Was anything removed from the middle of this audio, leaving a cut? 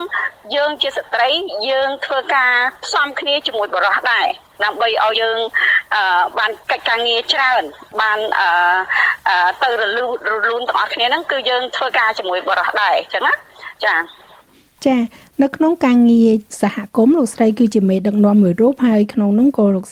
yes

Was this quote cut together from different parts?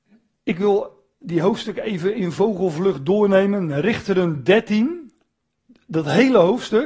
no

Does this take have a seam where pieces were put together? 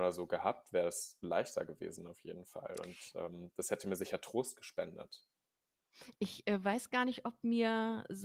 yes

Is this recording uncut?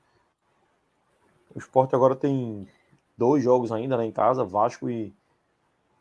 yes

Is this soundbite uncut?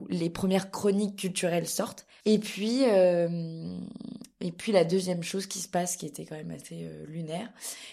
no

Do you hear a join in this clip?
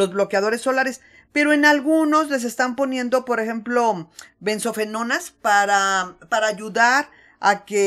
no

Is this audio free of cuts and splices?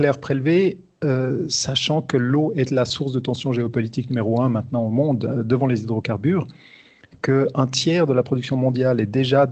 yes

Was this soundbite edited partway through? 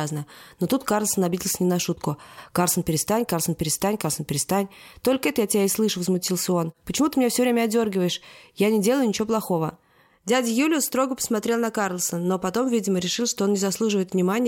no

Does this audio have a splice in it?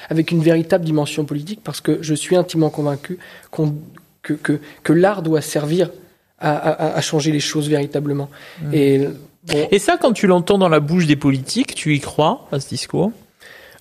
no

